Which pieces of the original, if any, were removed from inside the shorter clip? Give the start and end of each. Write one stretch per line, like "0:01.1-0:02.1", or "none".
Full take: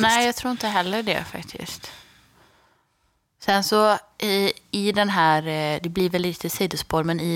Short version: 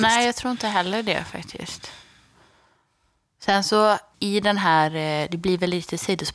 0:04.1-0:04.7